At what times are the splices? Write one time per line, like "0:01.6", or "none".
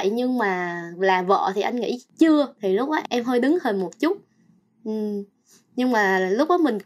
none